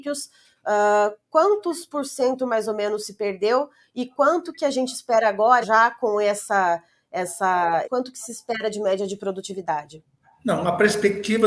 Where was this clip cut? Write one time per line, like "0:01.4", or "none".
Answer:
0:05.6
0:07.8